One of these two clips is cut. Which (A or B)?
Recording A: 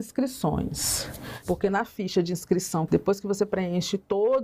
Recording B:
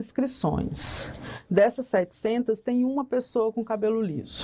A